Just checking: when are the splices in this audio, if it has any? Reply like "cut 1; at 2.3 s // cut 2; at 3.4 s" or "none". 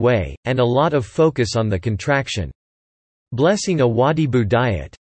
none